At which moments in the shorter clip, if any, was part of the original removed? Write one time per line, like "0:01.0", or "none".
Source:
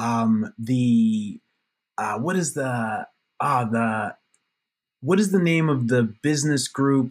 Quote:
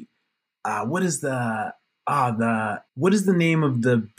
0:02.9